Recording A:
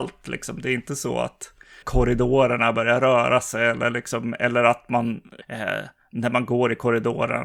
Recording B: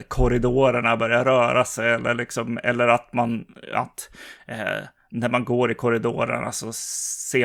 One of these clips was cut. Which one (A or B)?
A